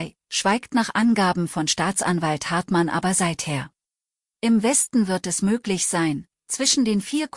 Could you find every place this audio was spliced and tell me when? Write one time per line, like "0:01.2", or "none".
0:04.3